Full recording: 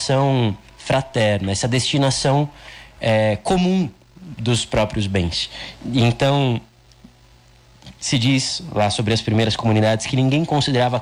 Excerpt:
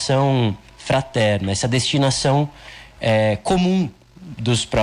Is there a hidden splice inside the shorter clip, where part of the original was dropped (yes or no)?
no